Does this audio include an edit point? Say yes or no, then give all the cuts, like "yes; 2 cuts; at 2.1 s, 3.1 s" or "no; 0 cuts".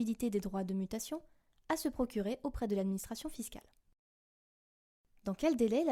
no; 0 cuts